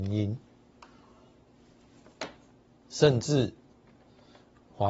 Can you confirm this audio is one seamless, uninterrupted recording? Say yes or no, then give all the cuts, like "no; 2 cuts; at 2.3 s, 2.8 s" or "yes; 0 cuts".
no; 1 cut; at 2.8 s